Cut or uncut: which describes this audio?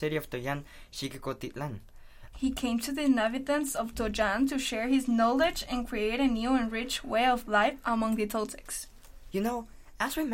cut